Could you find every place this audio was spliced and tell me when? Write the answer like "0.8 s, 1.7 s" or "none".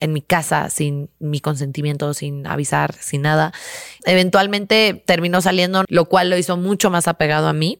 4.0 s, 5.8 s